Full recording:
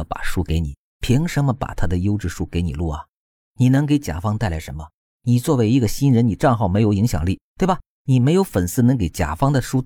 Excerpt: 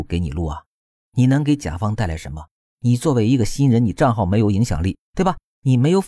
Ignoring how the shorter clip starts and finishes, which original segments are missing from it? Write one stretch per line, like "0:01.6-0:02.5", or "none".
none

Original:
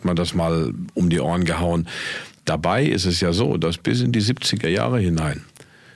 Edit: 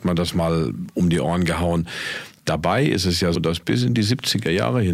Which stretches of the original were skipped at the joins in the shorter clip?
0:03.3-0:03.5

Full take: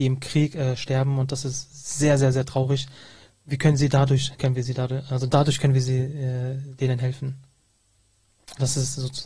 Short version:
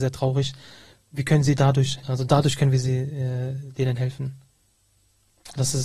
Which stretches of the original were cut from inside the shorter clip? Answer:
0:04.4-0:05.1

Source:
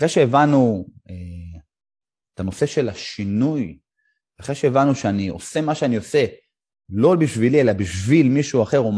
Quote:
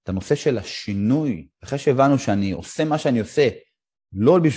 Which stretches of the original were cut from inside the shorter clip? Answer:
0:03.8-0:04.3

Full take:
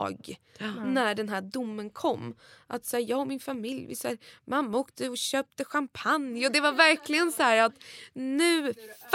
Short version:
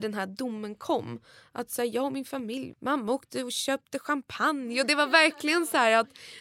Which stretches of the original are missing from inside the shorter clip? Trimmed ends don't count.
0:03.9-0:04.4

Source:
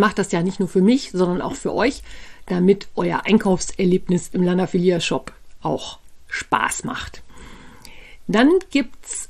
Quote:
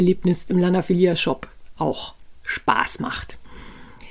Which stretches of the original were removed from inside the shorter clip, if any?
none

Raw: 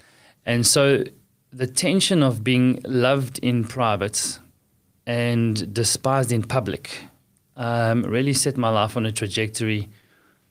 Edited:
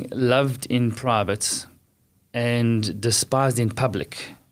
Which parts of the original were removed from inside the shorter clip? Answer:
none

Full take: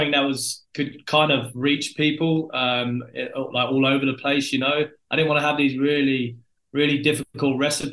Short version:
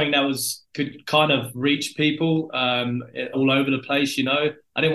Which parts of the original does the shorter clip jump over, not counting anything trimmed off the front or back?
0:03.3-0:03.7

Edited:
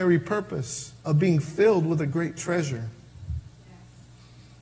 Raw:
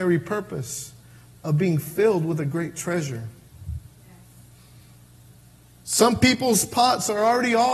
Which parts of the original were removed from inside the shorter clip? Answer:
0:01.0-0:01.4

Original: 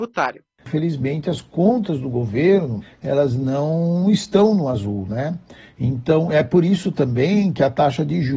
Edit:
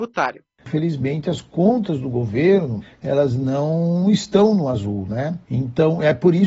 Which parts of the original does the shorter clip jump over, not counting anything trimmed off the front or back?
0:05.4-0:05.7

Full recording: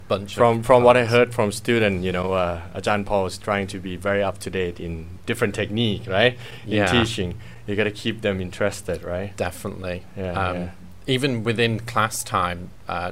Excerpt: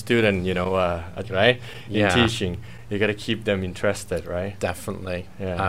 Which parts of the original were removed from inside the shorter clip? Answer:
0:02.8-0:06.0

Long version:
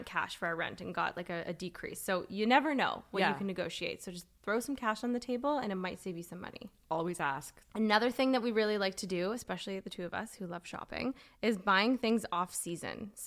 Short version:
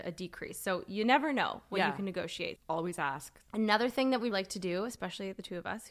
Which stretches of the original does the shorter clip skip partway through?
0:04.0-0:06.8
0:08.5-0:08.8

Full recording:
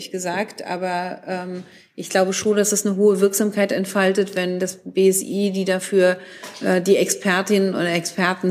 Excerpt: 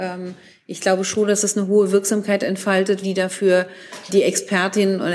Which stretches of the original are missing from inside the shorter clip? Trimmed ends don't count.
0:04.3-0:05.5
0:06.6-0:06.8

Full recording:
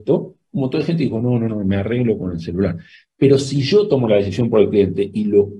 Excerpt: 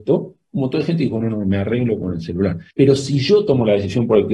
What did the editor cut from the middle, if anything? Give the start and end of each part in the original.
0:01.2-0:01.4
0:02.9-0:03.1

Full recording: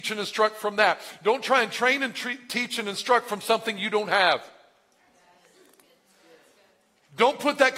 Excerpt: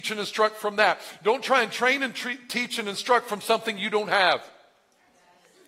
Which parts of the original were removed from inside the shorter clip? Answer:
none

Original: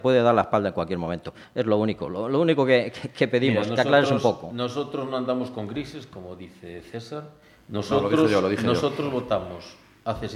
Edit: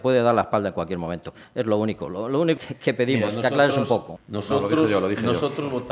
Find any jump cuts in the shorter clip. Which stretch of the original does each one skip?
0:02.6-0:02.9
0:04.5-0:07.6

